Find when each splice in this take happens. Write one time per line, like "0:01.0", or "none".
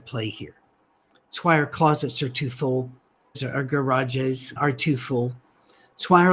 0:03.3
0:04.6